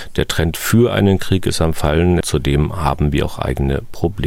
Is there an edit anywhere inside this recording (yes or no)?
yes